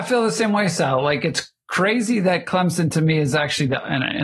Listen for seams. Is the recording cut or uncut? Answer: uncut